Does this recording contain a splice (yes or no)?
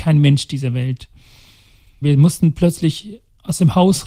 yes